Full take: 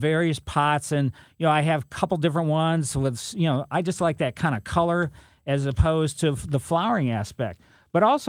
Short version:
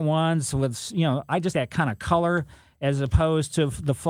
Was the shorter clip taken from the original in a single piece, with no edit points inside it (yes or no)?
no